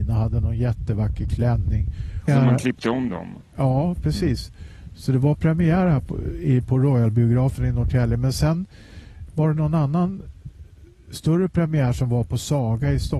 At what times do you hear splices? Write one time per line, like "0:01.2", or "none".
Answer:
0:02.3